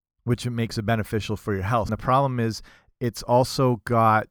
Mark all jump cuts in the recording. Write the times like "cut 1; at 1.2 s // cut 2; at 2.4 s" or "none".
cut 1; at 1.9 s